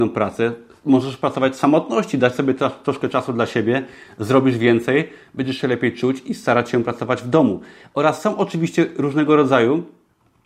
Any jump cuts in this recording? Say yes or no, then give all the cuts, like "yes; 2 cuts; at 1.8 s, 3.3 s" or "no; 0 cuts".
no; 0 cuts